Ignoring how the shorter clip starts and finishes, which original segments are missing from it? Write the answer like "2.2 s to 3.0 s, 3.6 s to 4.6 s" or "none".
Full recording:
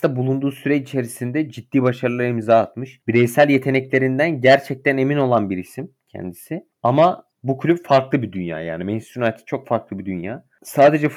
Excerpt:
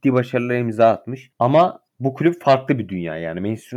3.0 s to 6.8 s

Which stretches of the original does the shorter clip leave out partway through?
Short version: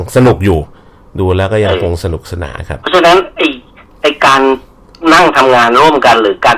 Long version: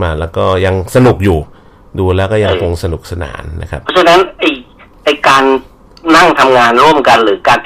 3.4 s to 3.6 s

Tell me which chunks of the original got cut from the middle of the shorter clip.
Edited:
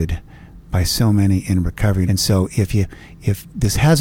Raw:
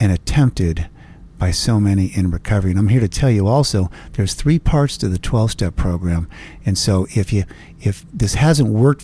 2.7 s to 6.6 s

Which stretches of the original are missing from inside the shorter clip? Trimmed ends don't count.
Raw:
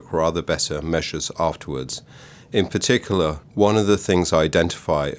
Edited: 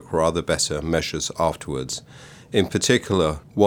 none

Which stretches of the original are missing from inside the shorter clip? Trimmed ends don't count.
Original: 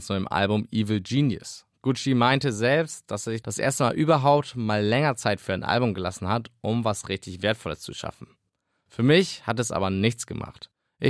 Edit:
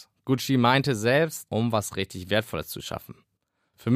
3.1 s to 6.6 s

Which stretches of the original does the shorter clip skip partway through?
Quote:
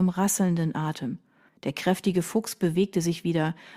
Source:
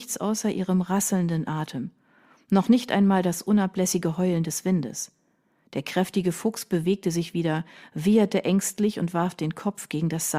2.2 s to 5.6 s

